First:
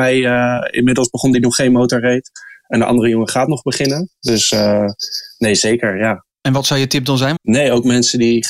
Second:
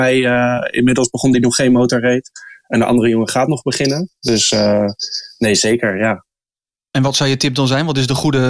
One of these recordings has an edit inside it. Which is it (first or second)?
first